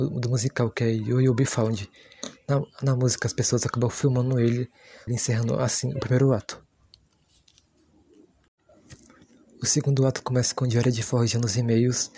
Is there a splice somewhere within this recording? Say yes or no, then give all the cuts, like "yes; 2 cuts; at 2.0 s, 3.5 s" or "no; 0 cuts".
yes; 1 cut; at 5.1 s